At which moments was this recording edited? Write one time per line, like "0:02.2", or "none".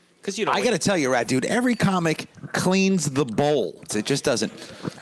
0:01.2
0:03.9